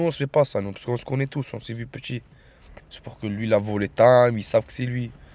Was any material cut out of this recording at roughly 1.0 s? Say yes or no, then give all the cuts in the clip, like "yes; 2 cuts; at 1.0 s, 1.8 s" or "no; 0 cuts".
no; 1 cut; at 2.8 s